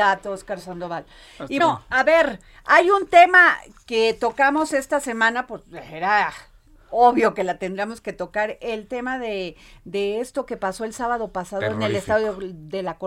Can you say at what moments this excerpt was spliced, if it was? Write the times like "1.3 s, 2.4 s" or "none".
1.6 s